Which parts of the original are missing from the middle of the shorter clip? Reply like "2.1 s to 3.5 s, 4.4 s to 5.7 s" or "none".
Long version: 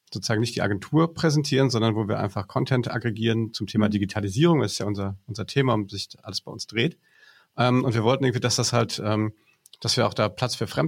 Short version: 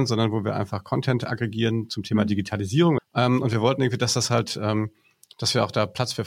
4.6 s to 7.4 s

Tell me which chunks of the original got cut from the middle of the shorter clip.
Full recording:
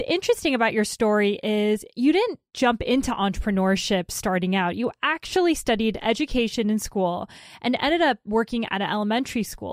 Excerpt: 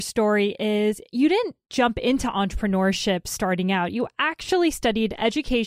none

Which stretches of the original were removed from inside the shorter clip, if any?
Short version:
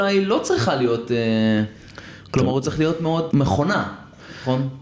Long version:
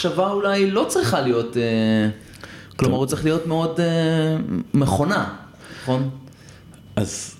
3.8 s to 4.7 s

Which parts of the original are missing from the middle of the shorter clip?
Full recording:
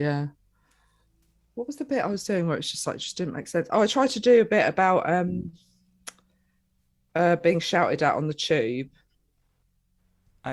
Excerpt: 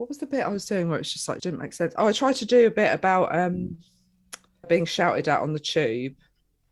3.0 s to 3.1 s, 6.4 s to 7.4 s

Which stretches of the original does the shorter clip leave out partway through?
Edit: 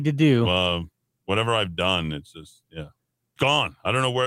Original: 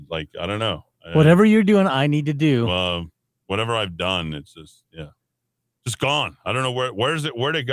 5.6 s to 6.0 s

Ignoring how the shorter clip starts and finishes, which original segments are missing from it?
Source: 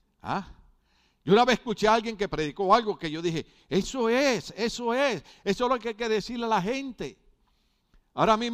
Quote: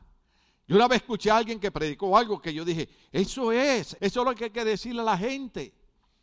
4.5 s to 5.4 s

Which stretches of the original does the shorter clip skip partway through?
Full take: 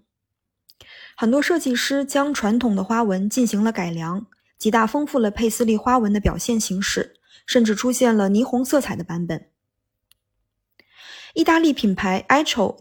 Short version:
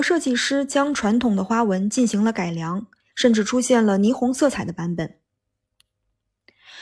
4.5 s to 7.4 s

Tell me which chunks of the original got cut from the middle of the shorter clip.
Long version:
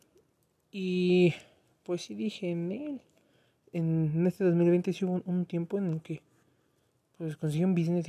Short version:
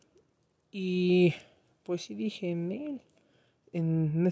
none

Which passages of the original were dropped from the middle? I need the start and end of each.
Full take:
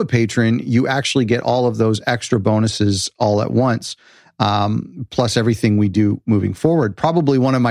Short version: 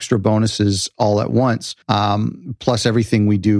4.0 s to 4.3 s

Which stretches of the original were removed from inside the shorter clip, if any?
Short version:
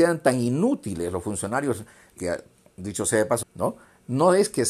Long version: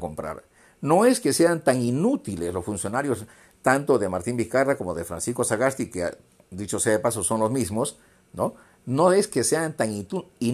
3.6 s to 5.9 s, 7.2 s to 8.2 s

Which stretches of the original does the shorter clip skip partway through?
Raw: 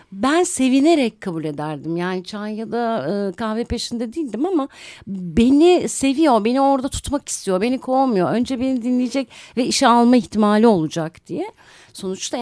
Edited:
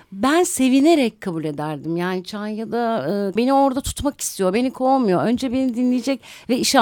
3.4 s to 6.4 s

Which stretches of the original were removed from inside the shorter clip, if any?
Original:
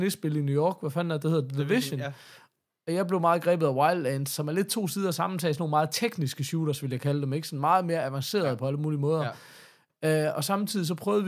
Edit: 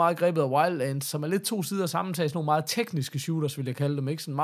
none

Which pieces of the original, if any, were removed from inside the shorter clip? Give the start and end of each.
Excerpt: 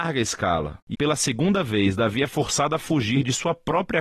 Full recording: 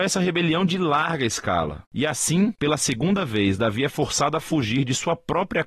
2.0 s to 2.6 s

